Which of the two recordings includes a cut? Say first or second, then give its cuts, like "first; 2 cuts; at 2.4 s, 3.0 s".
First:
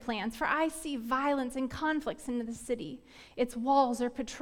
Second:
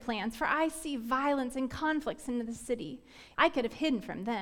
second; 1 cut; at 3.3 s